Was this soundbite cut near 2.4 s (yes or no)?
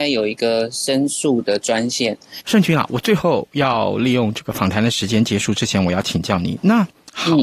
yes